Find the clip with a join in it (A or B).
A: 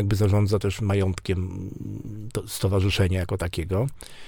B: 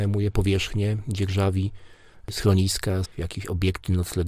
B